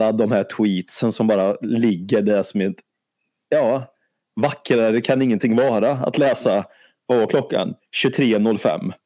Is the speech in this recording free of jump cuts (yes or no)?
yes